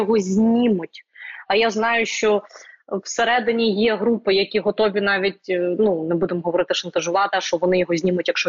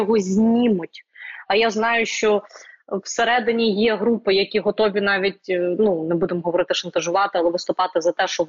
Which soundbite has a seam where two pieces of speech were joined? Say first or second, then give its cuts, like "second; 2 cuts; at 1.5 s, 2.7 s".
first; 1 cut; at 7.3 s